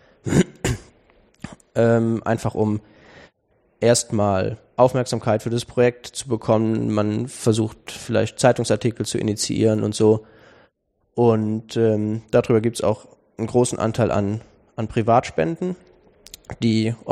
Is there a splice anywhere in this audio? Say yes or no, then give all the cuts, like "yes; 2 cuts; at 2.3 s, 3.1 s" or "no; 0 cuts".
no; 0 cuts